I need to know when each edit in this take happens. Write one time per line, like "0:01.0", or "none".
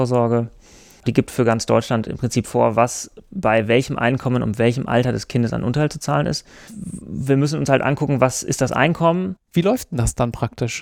0:01.0
0:06.7
0:09.4